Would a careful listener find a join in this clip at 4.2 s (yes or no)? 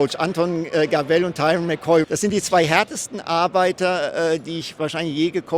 no